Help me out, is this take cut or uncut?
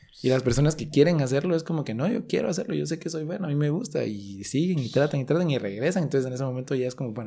uncut